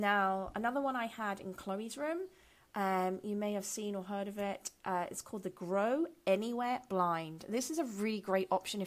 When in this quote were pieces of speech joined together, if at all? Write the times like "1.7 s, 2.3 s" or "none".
none